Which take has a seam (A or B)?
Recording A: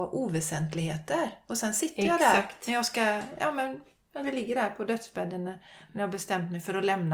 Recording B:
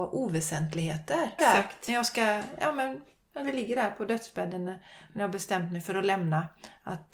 B